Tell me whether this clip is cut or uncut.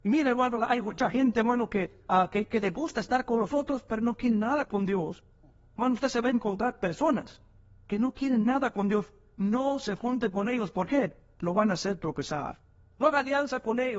uncut